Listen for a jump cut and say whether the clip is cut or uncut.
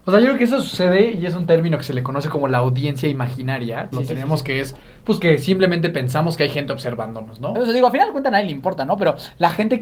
cut